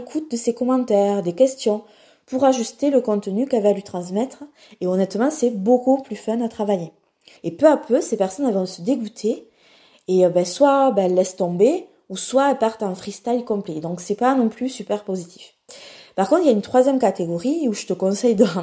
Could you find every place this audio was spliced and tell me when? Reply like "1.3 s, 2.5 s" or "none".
7.4 s